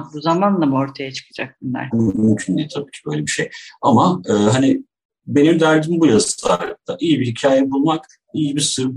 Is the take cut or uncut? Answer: cut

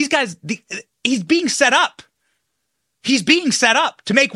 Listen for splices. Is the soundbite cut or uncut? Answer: cut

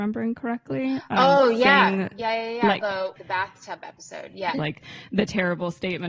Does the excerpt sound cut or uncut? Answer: cut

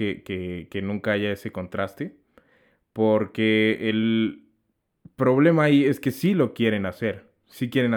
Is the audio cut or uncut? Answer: uncut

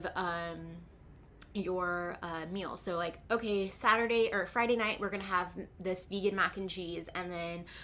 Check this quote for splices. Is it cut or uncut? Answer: uncut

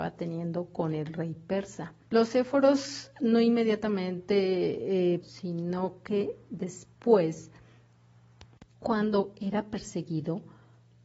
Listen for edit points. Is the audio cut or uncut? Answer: cut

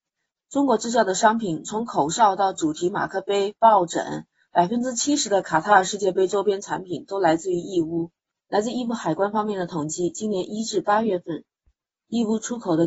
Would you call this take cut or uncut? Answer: uncut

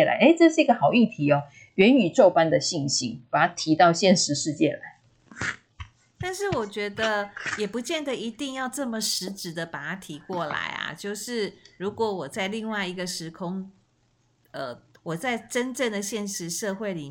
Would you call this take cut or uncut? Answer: cut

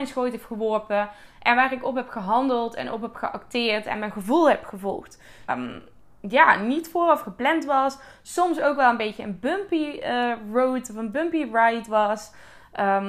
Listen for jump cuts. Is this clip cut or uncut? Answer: cut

